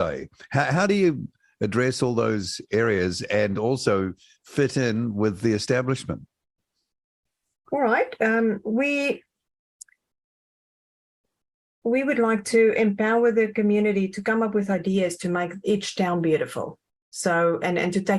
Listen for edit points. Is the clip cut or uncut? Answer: uncut